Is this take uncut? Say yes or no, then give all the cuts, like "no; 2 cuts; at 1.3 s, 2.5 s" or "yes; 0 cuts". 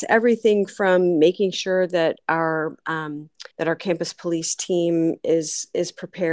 no; 1 cut; at 3.5 s